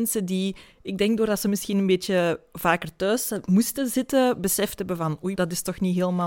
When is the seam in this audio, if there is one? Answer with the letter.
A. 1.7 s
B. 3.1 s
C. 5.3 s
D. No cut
C